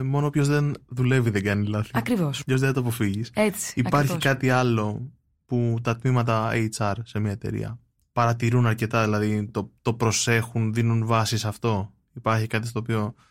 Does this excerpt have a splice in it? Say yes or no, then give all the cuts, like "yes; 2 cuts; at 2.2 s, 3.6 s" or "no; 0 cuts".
no; 0 cuts